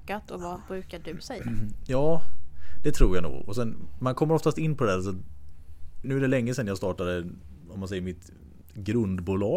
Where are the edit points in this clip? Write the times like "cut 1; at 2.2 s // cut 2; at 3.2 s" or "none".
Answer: cut 1; at 6.0 s